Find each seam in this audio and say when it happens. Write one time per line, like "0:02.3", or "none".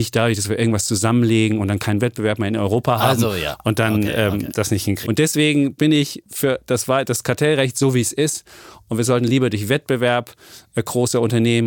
0:05.0